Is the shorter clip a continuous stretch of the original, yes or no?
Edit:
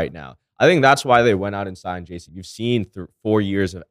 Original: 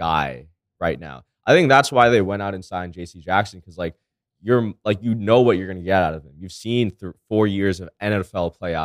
no